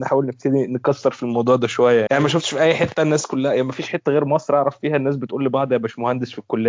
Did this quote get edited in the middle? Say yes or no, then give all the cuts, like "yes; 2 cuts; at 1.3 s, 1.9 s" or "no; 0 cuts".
yes; 1 cut; at 2.1 s